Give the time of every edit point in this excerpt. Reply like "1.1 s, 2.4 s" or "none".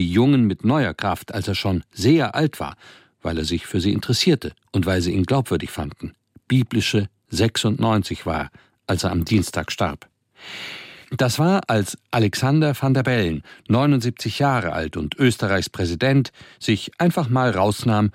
11.0 s